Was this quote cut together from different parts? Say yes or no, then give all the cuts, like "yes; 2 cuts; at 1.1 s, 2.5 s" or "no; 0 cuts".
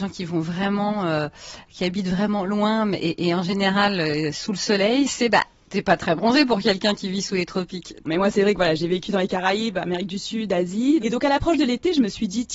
yes; 2 cuts; at 8.0 s, 11.0 s